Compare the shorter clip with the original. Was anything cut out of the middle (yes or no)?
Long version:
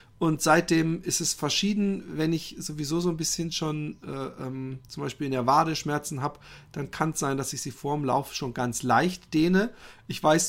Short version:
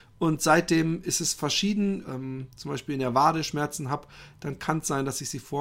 yes